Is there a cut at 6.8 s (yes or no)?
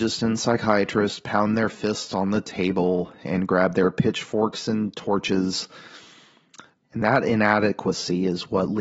yes